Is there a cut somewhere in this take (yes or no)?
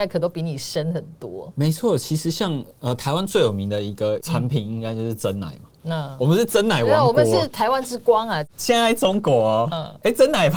no